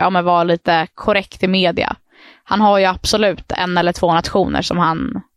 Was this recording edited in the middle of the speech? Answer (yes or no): no